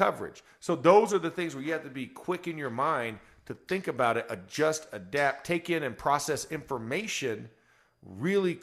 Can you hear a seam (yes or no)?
no